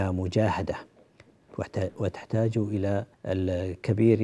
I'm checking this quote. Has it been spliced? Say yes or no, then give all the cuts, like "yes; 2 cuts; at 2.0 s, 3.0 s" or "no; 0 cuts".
yes; 1 cut; at 3.1 s